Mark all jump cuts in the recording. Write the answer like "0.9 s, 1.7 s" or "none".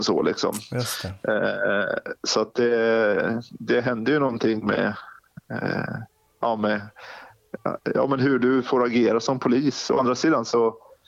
none